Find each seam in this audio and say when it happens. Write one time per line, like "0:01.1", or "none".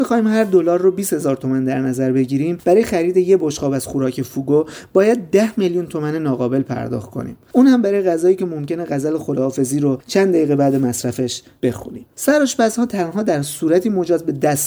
0:12.1